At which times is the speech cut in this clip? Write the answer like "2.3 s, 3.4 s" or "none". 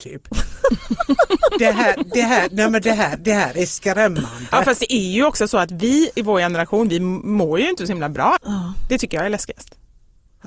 8.4 s